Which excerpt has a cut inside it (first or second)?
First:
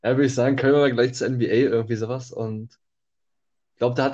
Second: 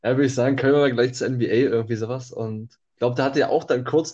second